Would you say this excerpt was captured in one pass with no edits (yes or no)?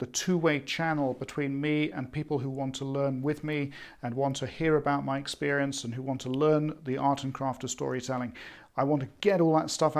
yes